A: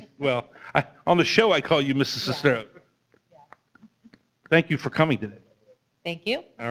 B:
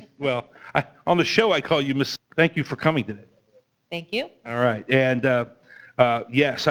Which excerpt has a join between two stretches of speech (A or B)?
B